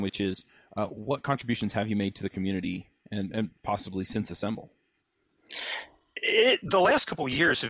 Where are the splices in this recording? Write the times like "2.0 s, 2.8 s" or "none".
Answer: none